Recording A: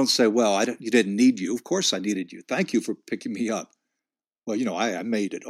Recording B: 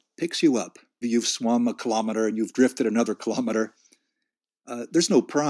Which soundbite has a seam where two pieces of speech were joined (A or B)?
B